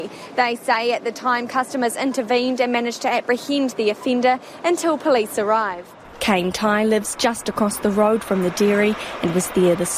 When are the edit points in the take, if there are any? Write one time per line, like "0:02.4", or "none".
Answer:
none